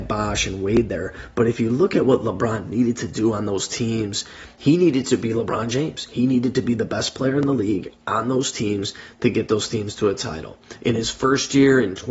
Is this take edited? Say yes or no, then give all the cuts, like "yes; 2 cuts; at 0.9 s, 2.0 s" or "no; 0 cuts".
no; 0 cuts